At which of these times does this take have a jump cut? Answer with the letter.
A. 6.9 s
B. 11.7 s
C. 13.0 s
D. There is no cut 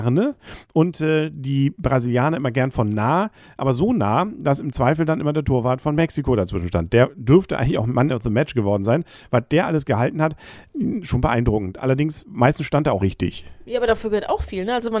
C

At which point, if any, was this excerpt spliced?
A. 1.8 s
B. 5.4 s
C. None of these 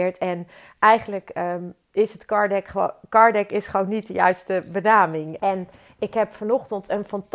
B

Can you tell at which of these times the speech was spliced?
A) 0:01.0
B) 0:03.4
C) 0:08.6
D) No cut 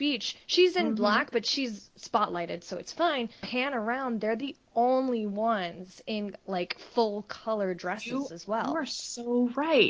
B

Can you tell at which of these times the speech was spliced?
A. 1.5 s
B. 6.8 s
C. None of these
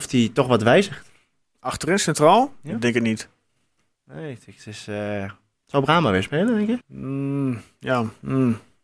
B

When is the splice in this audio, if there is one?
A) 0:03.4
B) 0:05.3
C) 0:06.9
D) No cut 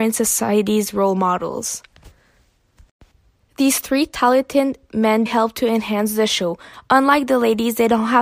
B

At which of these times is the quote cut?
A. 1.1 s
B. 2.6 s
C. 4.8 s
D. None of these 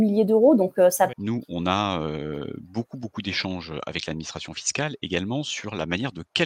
A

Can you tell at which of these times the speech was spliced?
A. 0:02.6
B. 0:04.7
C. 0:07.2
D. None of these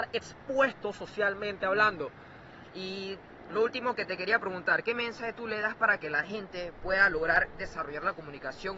A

